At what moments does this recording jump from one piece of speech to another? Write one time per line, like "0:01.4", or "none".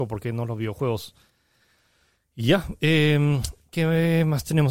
none